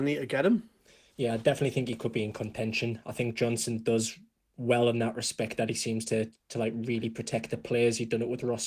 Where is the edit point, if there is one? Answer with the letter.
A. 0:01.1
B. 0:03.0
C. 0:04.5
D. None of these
D